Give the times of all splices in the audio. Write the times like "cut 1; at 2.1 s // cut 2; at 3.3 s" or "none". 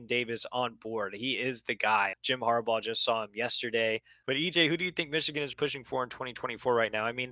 cut 1; at 2.1 s // cut 2; at 4.2 s // cut 3; at 5.5 s

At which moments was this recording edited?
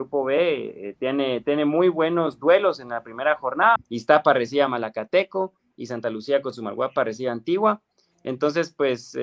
cut 1; at 3.8 s

